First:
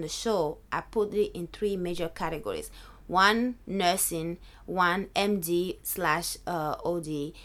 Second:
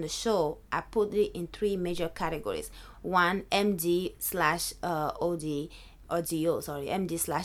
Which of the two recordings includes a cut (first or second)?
second